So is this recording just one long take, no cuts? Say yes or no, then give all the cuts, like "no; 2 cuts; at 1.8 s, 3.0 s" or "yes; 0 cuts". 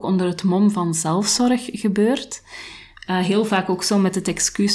yes; 0 cuts